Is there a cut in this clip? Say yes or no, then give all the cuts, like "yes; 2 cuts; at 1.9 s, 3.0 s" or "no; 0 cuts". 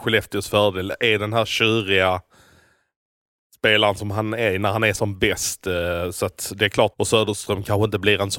yes; 1 cut; at 6.9 s